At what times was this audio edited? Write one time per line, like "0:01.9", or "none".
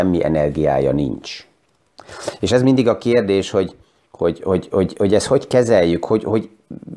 none

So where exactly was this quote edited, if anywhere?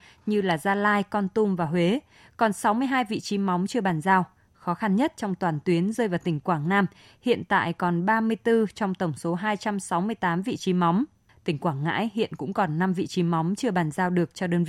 none

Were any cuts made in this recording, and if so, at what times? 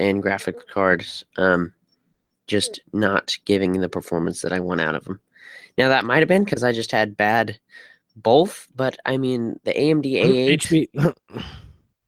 none

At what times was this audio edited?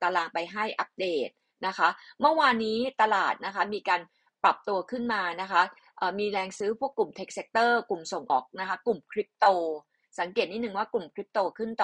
0:08.3

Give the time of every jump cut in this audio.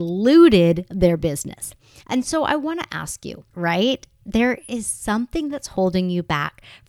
0:02.0
0:03.5

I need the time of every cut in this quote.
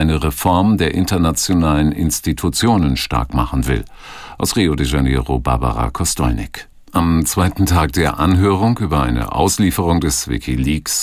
0:06.7

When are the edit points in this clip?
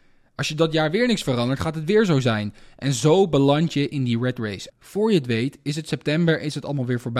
0:04.7

